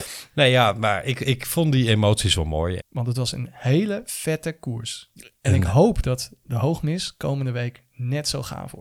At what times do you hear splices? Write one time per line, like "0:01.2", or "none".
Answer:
0:02.8